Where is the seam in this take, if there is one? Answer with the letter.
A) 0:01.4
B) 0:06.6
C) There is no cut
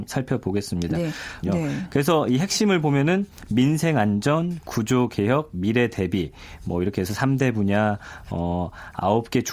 A